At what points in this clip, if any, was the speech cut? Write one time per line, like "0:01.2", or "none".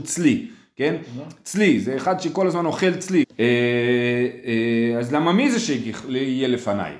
0:03.2